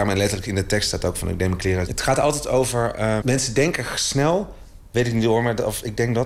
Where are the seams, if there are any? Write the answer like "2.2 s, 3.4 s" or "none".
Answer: 1.9 s, 3.2 s